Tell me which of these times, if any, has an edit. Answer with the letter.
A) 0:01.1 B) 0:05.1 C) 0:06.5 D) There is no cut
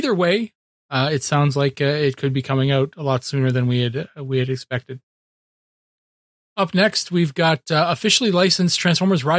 C